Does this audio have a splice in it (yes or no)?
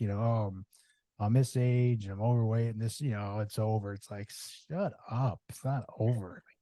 no